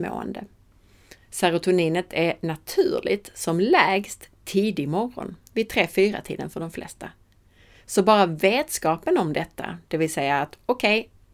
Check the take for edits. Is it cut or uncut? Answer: uncut